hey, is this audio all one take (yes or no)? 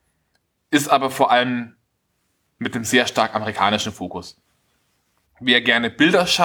no